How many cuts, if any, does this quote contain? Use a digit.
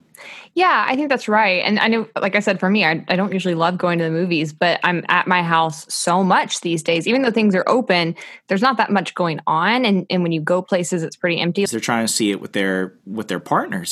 1